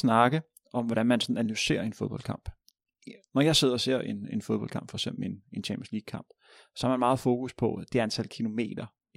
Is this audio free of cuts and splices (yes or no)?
yes